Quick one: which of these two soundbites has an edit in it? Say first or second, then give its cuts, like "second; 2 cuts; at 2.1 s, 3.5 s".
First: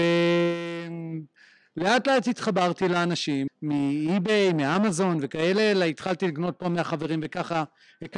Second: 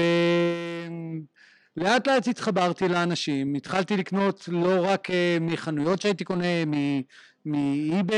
first; 1 cut; at 3.5 s